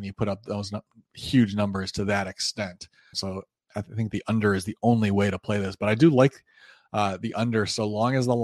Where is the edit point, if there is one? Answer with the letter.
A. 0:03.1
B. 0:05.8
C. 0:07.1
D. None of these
A